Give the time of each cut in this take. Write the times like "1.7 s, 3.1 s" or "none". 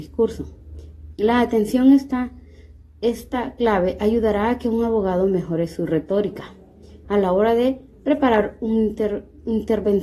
1.1 s, 7.0 s